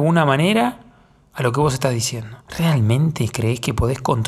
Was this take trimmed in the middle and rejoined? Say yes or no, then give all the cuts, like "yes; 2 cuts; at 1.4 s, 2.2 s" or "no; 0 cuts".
yes; 1 cut; at 2.5 s